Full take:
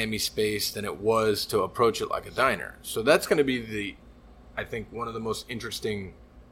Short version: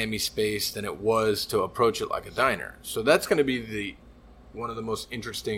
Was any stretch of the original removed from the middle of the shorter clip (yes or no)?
yes